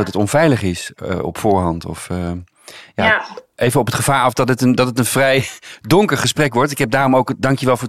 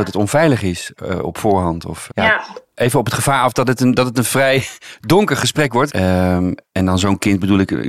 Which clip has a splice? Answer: second; 2 cuts; at 2.1 s, 5.9 s

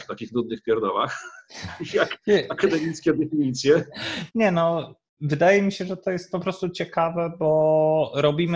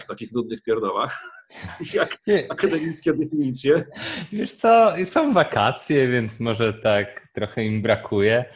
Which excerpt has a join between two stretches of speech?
first; 1 cut; at 4.3 s

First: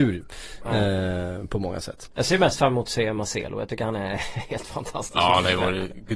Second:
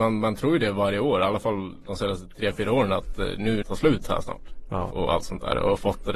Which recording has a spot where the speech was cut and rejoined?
second; 2 cuts; at 3.6 s, 4.9 s

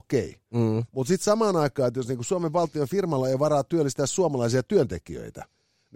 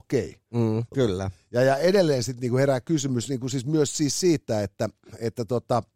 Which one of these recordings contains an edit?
second; 1 cut; at 0.9 s

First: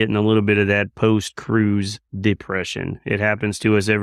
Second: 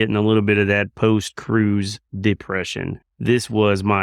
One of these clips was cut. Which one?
second; 1 cut; at 3.0 s

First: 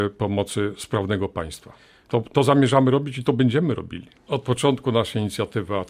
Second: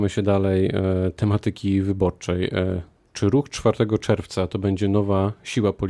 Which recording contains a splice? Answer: first; 1 cut; at 4.2 s

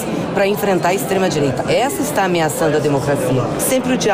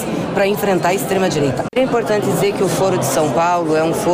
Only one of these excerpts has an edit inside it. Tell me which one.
second; 1 cut; at 1.7 s

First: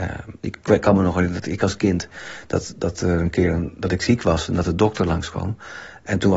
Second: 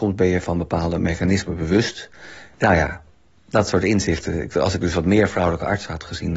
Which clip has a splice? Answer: second; 1 cut; at 2.5 s

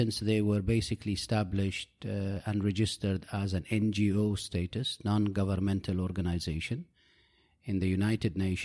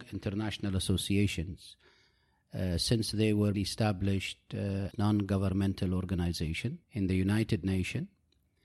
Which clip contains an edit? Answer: second; 3 cuts; at 3.5 s, 4.9 s, 6.8 s

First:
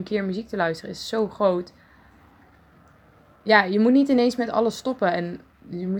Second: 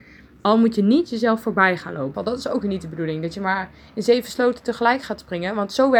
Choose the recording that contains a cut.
second; 1 cut; at 2.1 s

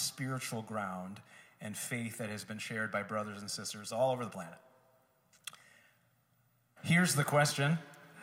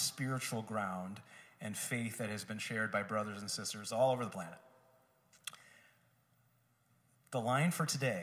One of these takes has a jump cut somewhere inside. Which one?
first; 1 cut; at 6.8 s

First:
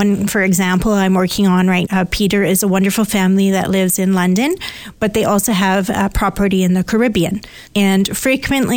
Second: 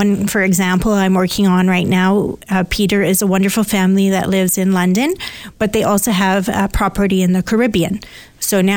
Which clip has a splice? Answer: first; 2 cuts; at 1.8 s, 7.7 s

